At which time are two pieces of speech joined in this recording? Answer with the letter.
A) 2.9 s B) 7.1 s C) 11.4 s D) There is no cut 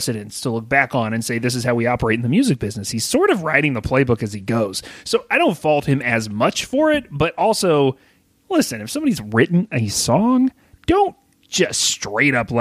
D